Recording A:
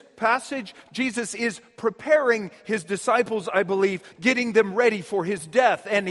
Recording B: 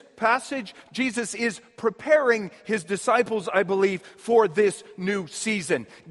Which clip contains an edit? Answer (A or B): A